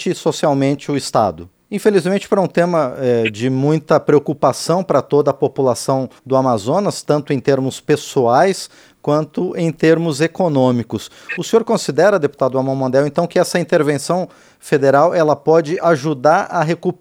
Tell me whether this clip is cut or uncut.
cut